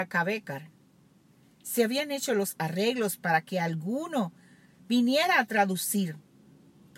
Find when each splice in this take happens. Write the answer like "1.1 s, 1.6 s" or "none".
none